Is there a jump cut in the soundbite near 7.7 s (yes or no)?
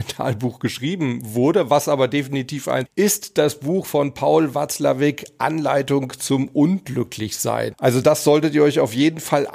yes